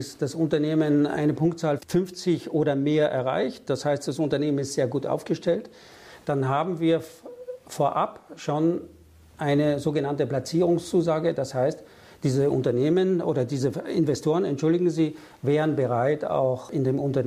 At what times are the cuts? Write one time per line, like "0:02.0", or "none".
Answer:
none